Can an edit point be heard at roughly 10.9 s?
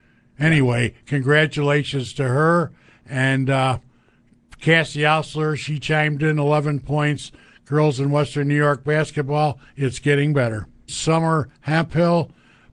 yes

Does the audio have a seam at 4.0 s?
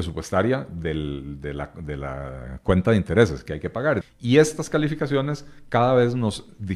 yes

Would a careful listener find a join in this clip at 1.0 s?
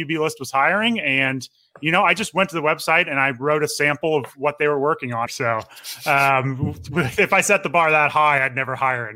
no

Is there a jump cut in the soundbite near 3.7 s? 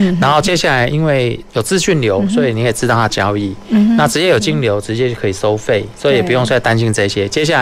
no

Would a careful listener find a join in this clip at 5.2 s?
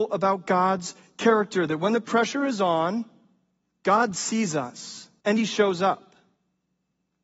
yes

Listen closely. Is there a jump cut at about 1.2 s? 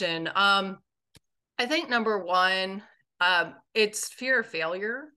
no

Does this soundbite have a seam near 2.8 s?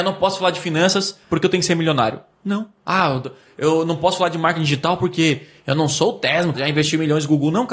no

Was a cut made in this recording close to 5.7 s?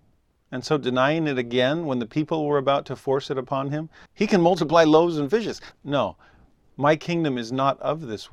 yes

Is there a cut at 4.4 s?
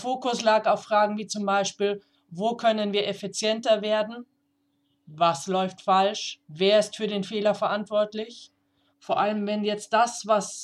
no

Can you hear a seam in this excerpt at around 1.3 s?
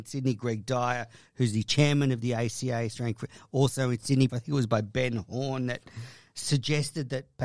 no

